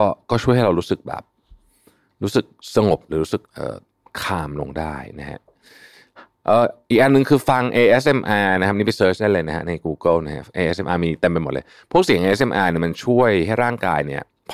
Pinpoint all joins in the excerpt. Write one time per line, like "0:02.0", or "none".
0:03.5